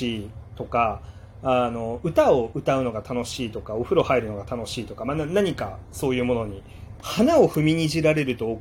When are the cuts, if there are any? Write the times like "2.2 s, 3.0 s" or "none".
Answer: 7.0 s